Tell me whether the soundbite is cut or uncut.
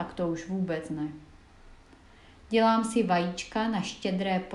uncut